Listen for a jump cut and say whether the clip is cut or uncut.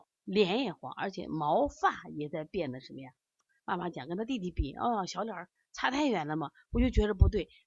uncut